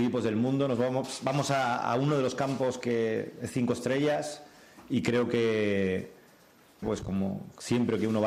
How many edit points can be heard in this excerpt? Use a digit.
1